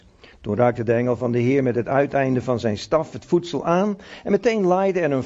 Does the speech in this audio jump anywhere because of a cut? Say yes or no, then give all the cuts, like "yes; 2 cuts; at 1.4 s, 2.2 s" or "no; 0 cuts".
no; 0 cuts